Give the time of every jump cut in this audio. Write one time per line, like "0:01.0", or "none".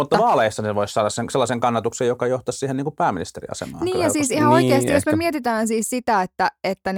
none